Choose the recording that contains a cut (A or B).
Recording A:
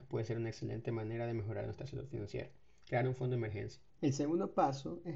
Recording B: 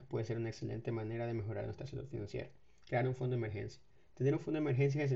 A